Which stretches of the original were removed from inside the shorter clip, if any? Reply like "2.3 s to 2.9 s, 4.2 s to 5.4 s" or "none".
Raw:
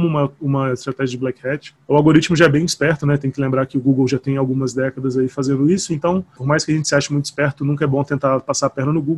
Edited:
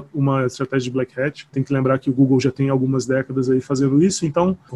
1.8 s to 3.2 s